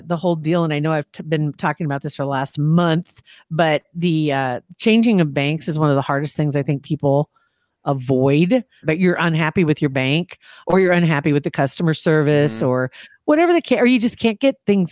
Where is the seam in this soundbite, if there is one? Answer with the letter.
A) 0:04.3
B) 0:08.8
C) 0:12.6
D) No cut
B